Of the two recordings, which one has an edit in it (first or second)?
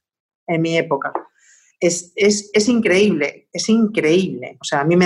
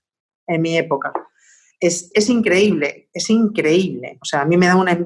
second